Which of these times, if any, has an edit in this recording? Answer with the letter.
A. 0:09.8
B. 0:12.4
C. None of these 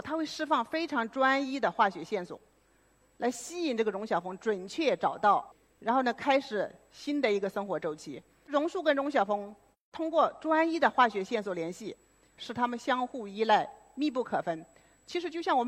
B